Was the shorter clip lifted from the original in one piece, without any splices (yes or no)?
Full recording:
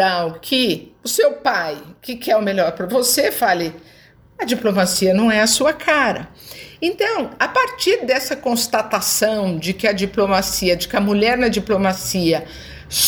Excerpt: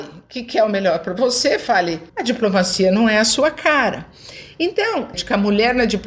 no